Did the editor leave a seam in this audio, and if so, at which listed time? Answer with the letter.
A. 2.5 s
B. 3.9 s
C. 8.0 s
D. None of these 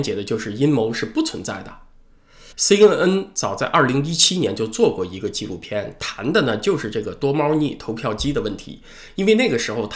A